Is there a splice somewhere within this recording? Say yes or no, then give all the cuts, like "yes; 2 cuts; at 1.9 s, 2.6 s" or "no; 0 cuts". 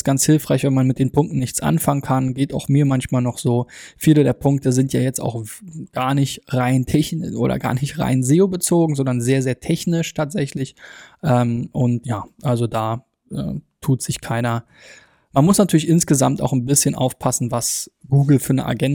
yes; 2 cuts; at 12.0 s, 15.3 s